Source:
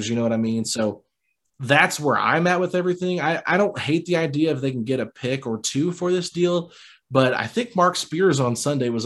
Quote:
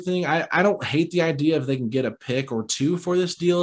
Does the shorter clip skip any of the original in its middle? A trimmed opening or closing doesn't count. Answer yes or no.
no